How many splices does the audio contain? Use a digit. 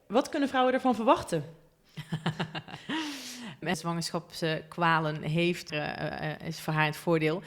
2